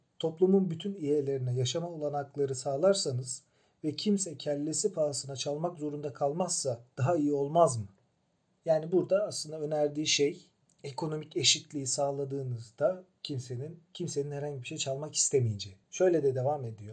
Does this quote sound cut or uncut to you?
uncut